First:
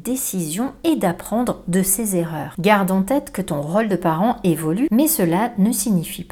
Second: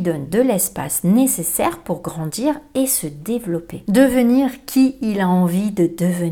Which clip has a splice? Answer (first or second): first